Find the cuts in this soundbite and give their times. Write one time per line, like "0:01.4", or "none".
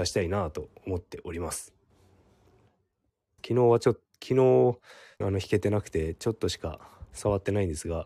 0:03.4
0:05.2